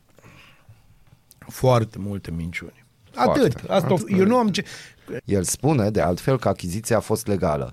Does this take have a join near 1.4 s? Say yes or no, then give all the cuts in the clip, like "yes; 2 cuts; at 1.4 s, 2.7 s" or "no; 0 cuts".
no; 2 cuts; at 4.0 s, 5.2 s